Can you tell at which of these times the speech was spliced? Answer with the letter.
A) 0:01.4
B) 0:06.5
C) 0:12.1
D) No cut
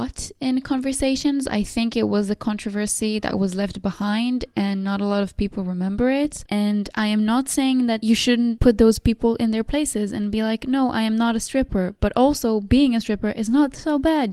B